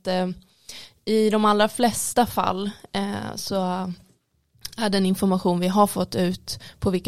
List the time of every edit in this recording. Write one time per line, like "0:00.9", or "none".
none